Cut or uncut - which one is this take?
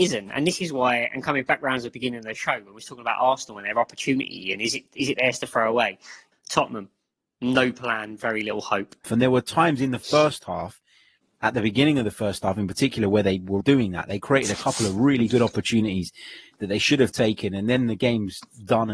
cut